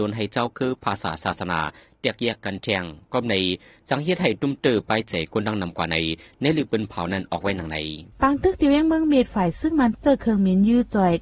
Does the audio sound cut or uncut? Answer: cut